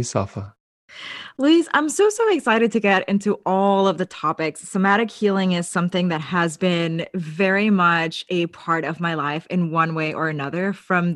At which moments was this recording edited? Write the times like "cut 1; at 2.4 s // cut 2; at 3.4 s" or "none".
none